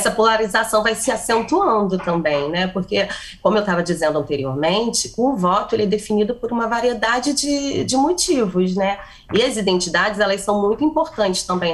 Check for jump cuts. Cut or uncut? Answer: uncut